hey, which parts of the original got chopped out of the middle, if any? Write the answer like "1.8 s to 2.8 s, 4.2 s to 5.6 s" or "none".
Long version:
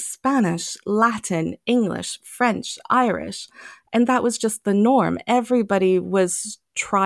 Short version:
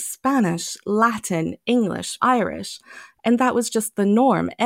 2.2 s to 2.9 s